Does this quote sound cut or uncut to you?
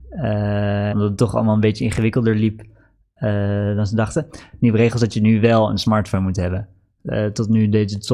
cut